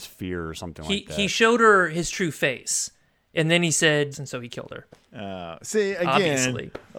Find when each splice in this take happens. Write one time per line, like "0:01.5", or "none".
0:04.1